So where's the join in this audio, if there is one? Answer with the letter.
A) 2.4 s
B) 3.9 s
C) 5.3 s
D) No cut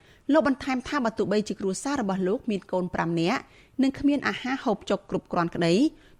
D